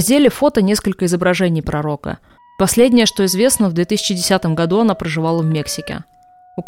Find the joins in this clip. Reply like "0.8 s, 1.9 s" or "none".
2.4 s